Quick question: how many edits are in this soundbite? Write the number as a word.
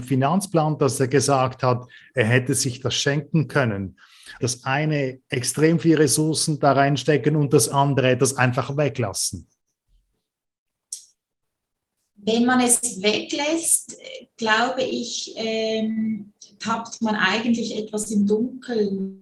one